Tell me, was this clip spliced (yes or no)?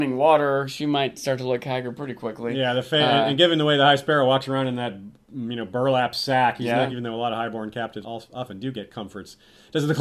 yes